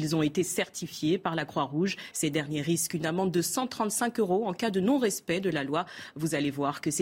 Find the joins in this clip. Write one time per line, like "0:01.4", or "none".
0:02.1